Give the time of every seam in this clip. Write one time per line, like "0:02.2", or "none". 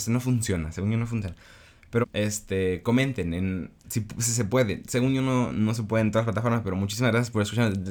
0:02.0